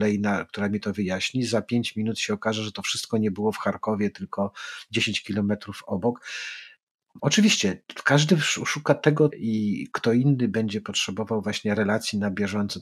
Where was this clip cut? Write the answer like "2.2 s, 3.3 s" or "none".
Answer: 7.2 s, 9.3 s